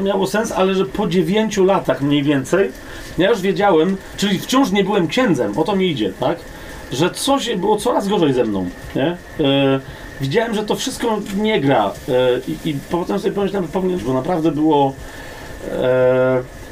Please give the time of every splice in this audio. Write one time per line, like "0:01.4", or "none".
0:12.9
0:14.0